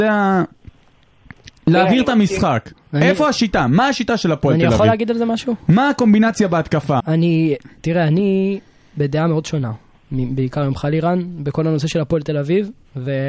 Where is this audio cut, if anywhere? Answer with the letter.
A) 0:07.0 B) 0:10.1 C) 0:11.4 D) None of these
A